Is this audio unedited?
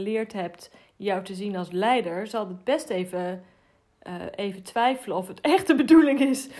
yes; 0 cuts

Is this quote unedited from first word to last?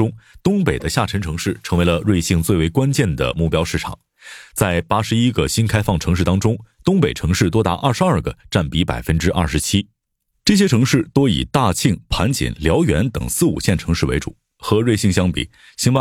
yes; 0 cuts

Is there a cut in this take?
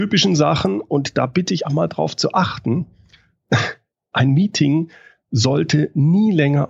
yes; 1 cut; at 1.6 s

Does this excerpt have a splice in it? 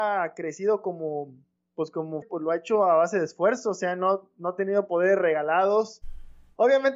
yes; 1 cut; at 2.2 s

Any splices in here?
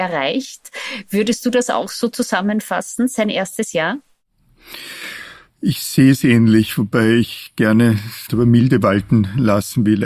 yes; 1 cut; at 8.3 s

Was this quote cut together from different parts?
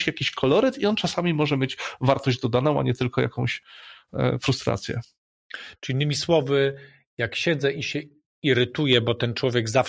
no; 0 cuts

